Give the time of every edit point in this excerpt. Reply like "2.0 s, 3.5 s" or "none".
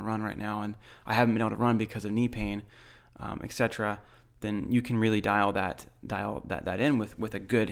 none